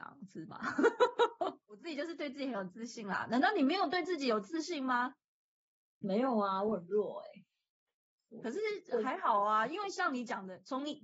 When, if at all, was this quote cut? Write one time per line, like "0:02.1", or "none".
none